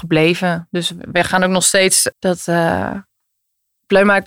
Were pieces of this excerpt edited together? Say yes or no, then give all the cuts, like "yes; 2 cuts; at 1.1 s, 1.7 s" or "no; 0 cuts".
yes; 1 cut; at 2.1 s